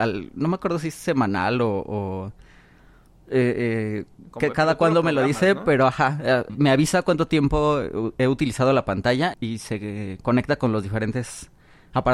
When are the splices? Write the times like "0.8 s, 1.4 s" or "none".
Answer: 6.5 s, 9.3 s